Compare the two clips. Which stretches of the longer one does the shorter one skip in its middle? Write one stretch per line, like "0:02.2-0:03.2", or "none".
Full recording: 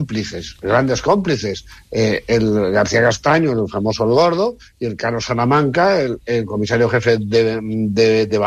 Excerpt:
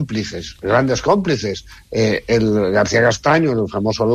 none